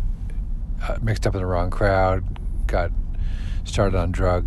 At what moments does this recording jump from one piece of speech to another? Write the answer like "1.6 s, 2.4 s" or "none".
none